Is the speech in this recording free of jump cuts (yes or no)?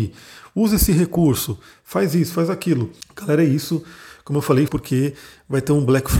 no